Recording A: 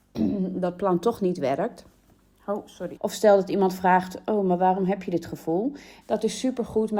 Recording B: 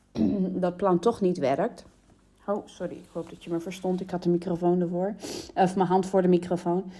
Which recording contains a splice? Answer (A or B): A